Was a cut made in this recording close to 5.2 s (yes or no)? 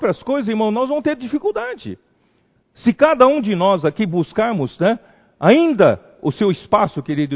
no